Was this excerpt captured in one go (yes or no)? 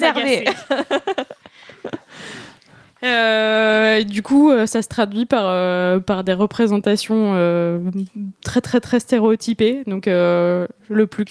yes